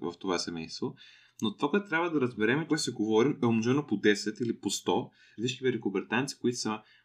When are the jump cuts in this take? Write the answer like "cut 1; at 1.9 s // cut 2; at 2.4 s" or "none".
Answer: cut 1; at 2.7 s // cut 2; at 5.4 s

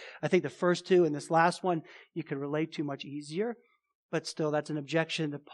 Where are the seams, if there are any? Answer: none

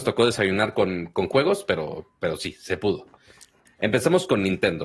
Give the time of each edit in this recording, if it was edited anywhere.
cut 1; at 3.7 s

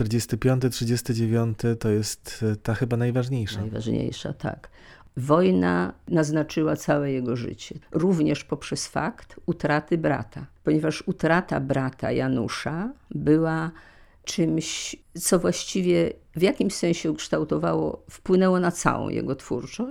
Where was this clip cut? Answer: cut 1; at 7.8 s

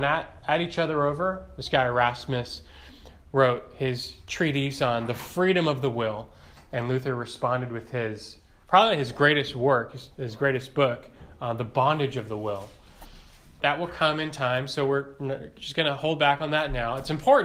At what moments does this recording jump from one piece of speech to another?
cut 1; at 13.6 s

